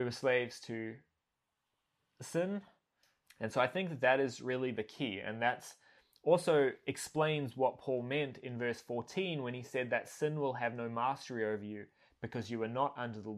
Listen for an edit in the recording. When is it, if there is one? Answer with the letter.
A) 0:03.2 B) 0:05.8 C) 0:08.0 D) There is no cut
A